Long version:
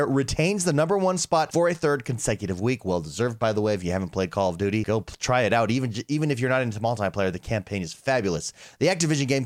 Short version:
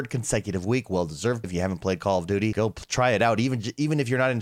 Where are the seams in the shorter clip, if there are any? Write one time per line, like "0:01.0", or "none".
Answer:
0:01.4